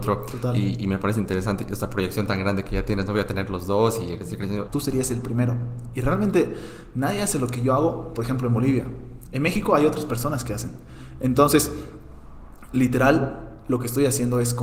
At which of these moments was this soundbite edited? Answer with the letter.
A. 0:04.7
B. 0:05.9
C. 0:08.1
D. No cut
A